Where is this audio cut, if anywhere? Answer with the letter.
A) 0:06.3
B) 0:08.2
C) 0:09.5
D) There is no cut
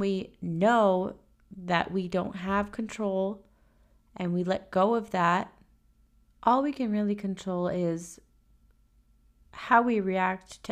A